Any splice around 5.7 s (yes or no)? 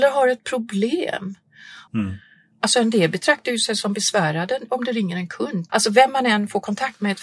yes